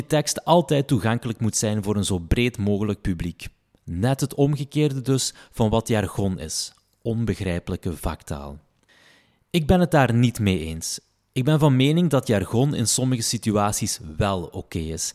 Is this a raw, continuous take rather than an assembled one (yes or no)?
yes